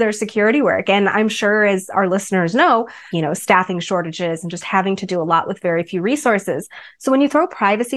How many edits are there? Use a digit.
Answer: 1